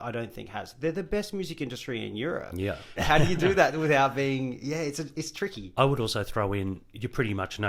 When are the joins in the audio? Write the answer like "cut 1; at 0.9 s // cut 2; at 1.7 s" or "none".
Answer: cut 1; at 3.0 s